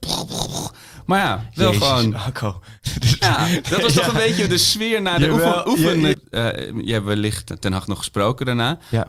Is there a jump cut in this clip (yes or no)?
yes